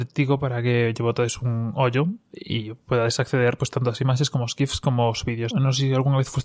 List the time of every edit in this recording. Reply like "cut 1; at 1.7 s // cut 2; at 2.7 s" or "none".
cut 1; at 5.5 s